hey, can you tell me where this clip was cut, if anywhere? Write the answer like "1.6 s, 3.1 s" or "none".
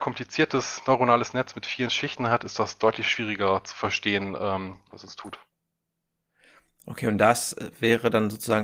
4.9 s

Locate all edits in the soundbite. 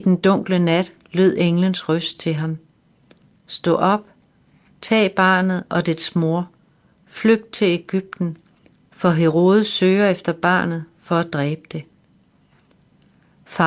none

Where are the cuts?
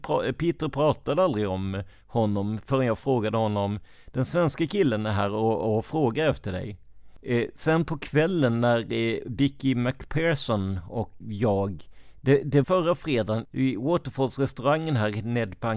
11.2 s, 12.6 s

